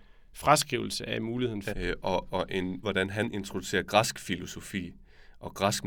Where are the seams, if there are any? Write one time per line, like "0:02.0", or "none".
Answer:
0:01.7
0:02.8